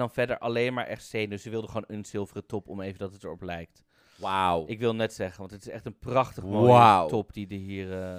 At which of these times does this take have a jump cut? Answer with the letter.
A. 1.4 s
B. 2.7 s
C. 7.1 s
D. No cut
D